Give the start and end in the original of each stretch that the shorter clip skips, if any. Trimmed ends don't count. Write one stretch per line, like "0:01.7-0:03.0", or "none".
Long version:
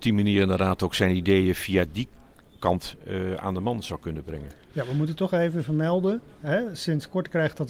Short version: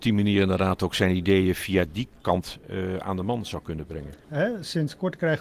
0:02.2-0:02.6
0:04.6-0:06.3